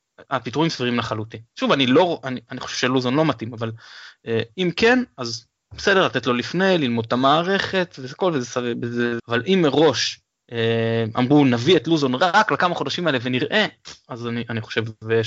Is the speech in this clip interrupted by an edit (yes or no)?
yes